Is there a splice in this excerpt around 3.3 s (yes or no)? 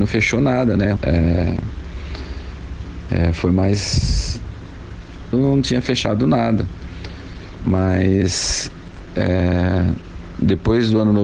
no